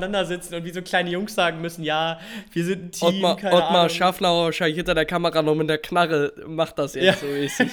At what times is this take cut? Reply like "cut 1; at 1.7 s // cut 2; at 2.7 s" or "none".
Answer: none

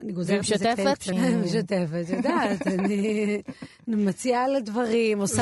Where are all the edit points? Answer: cut 1; at 1.1 s

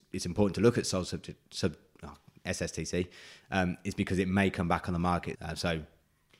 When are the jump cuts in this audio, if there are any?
cut 1; at 5.3 s

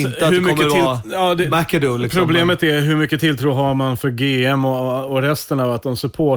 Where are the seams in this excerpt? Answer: cut 1; at 1.5 s

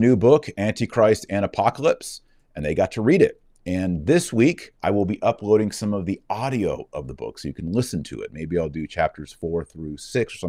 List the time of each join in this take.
cut 1; at 4.8 s

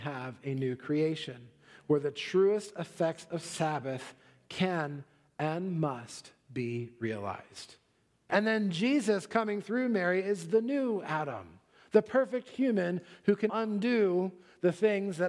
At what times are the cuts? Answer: cut 1; at 8.3 s // cut 2; at 13.5 s

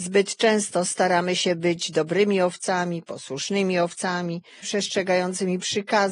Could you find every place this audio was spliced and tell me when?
cut 1; at 4.6 s

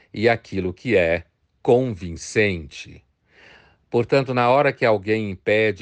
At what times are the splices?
none

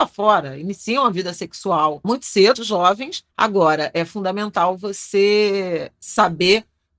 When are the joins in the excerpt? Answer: cut 1; at 2.5 s

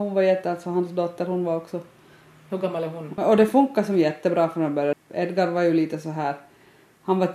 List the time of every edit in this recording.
cut 1; at 3.2 s // cut 2; at 4.9 s

